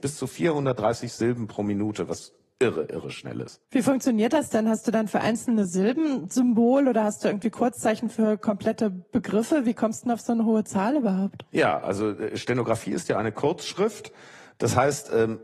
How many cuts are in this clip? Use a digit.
0